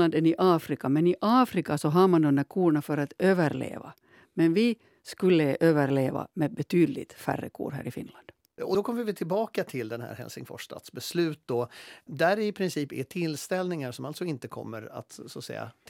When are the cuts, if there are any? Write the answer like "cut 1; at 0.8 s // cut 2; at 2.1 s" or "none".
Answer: cut 1; at 12.1 s